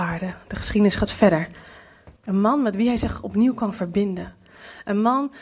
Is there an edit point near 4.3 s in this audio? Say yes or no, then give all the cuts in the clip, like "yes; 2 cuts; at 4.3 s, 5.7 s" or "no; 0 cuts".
no; 1 cut; at 2.2 s